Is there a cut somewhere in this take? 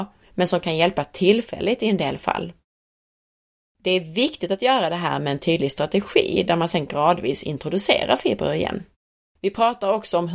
yes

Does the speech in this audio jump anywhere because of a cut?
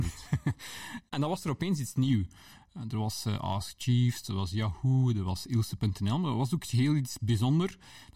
no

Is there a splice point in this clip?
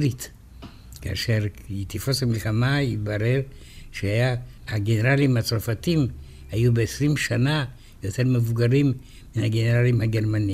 yes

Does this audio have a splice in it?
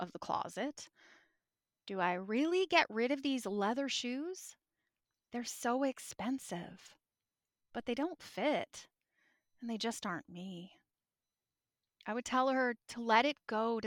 no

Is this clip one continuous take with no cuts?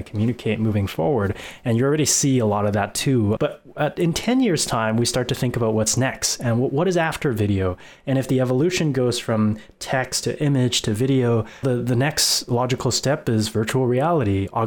no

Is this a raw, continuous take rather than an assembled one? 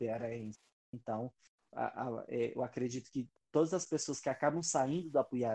yes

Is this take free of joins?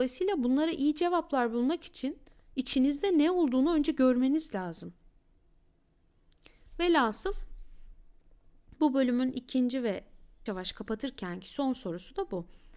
no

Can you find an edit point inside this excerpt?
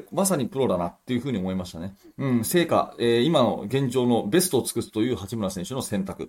no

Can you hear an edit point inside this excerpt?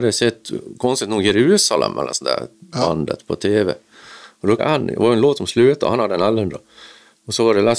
yes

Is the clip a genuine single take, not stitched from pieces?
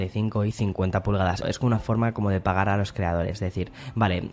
no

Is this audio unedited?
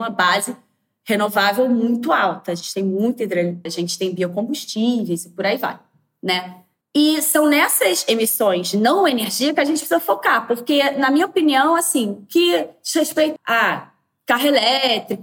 no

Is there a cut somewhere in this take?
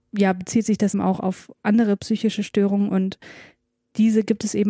yes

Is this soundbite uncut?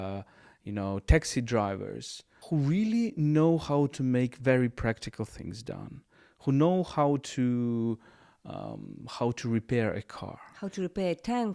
no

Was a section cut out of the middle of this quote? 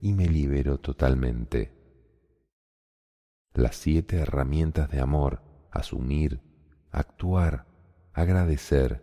yes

